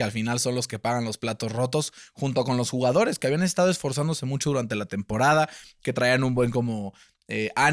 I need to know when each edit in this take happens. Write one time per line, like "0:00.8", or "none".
none